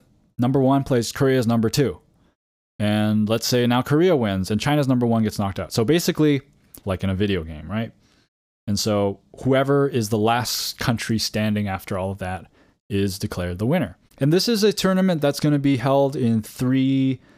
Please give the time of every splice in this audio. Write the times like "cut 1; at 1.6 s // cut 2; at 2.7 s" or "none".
cut 1; at 6.8 s // cut 2; at 14.1 s // cut 3; at 16.4 s